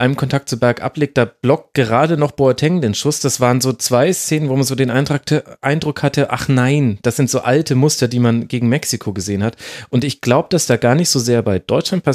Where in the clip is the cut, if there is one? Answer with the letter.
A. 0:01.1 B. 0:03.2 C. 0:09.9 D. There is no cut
C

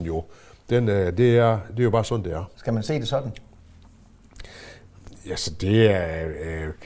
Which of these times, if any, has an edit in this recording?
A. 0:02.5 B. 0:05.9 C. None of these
A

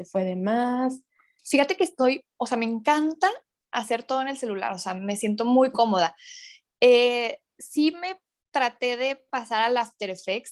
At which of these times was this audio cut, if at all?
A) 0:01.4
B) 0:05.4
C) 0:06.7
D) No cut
A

